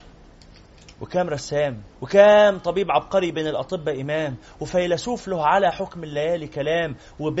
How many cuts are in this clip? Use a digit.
1